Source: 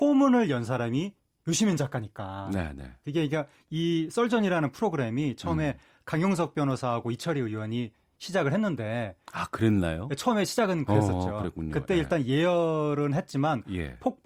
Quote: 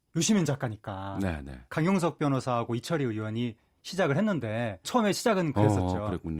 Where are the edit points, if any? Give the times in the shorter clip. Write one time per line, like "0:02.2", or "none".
0:01.7
0:04.8